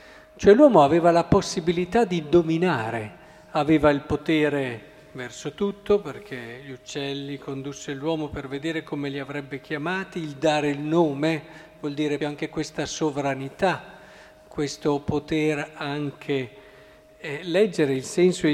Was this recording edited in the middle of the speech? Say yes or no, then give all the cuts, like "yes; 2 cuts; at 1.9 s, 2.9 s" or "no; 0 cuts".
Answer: yes; 1 cut; at 12.2 s